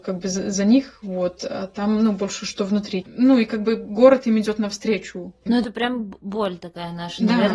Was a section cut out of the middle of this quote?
yes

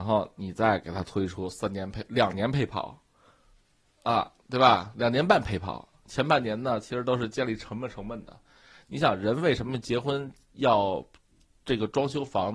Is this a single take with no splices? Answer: yes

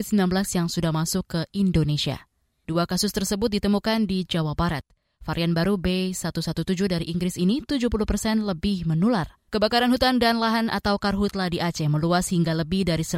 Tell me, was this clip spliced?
yes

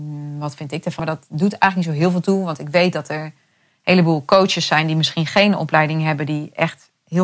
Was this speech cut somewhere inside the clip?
yes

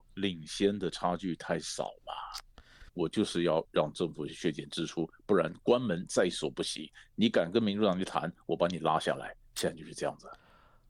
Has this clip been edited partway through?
yes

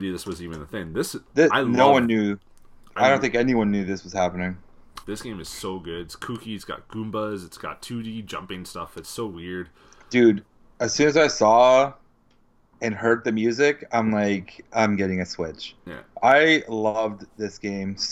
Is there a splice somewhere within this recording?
yes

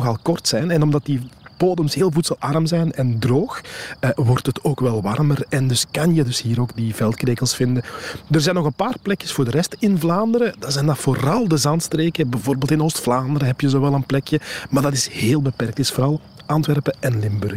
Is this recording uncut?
yes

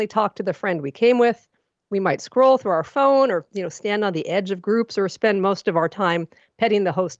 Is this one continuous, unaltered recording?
yes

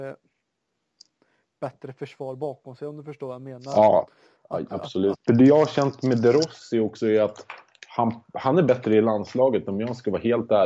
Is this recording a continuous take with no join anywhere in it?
no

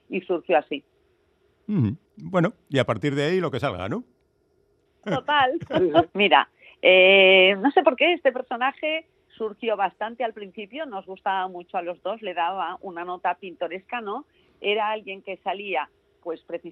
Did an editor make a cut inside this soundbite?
yes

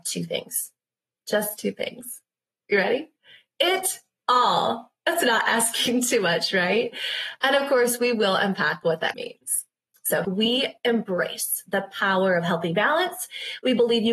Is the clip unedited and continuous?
no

